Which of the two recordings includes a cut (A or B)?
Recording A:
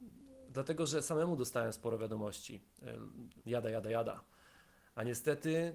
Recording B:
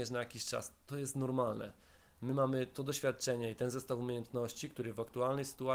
A